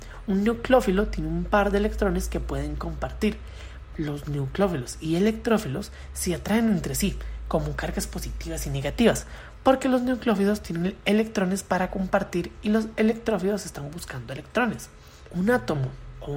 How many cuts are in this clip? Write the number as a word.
two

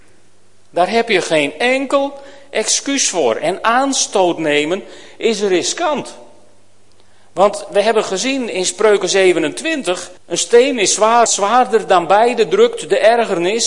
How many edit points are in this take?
two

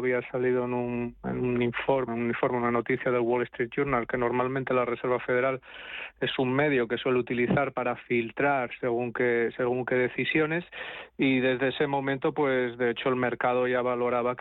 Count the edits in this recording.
one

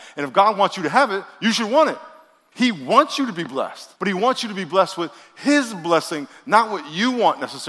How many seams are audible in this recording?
two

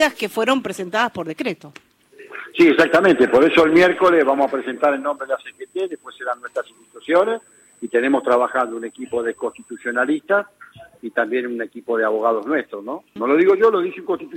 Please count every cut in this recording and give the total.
one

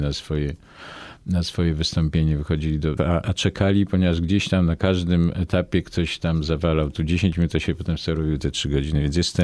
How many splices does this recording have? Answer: one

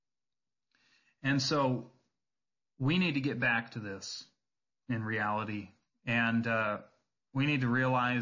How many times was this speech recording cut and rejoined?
one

